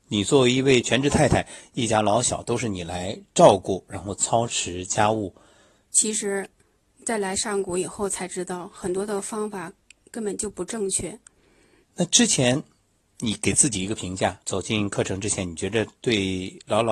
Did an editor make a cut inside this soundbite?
yes; 3 cuts; at 5.8 s, 11.8 s, 14.4 s

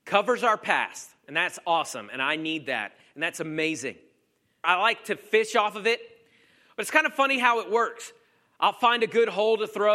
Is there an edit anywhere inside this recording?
yes; 1 cut; at 4.6 s

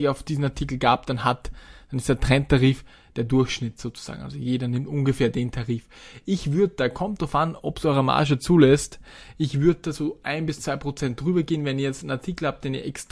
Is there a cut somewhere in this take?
no; 0 cuts

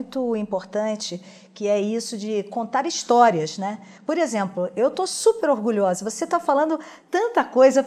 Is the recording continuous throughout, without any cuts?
yes; 0 cuts

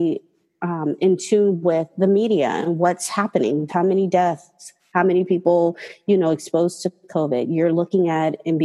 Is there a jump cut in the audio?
yes; 1 cut; at 3.7 s

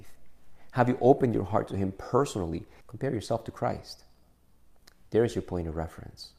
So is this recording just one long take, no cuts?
no; 1 cut; at 2.8 s

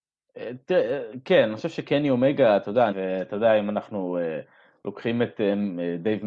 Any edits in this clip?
yes; 1 cut; at 2.9 s

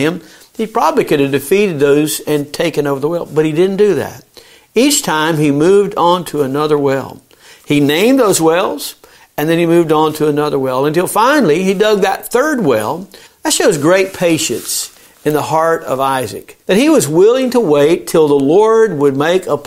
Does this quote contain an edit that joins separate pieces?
yes; 2 cuts; at 13.3 s, 16.6 s

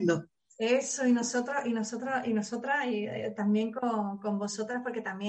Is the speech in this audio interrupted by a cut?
no; 0 cuts

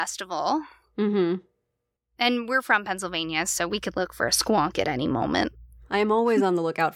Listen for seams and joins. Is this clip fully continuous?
no; 1 cut; at 5.8 s

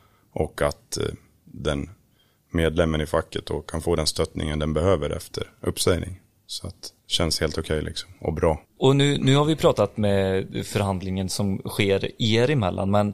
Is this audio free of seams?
no; 2 cuts; at 7.0 s, 8.6 s

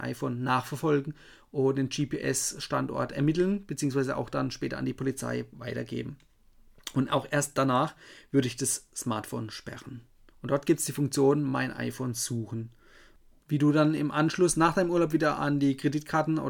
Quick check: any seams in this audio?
yes; 2 cuts; at 10.3 s, 13.4 s

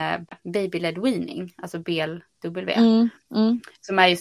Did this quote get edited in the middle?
no; 0 cuts

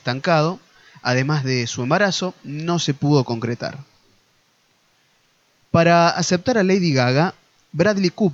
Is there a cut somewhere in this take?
no; 0 cuts

